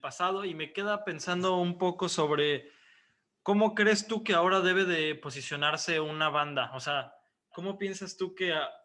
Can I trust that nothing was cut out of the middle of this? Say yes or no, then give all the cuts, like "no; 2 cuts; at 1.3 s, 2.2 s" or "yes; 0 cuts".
yes; 0 cuts